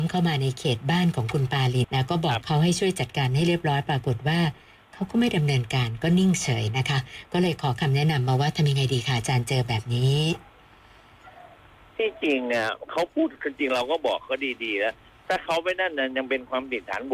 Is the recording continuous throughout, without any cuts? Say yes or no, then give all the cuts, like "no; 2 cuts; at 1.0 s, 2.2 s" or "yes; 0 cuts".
no; 1 cut; at 1.8 s